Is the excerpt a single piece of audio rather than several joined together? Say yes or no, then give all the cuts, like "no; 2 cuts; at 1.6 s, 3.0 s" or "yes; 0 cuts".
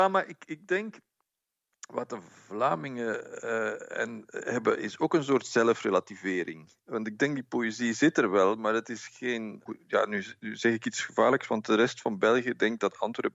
no; 1 cut; at 9.7 s